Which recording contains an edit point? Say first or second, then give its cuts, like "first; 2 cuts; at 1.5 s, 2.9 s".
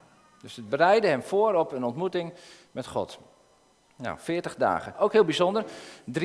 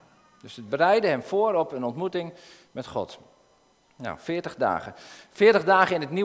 first; 1 cut; at 4.9 s